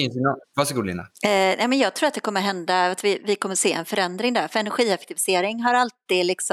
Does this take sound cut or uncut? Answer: cut